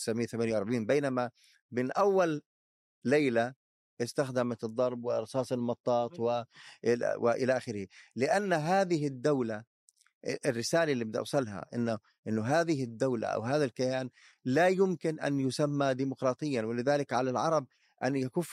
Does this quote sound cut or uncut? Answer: uncut